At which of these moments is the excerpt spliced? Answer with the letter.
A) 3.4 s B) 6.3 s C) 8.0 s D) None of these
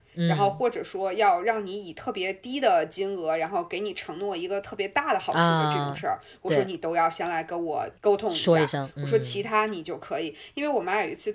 C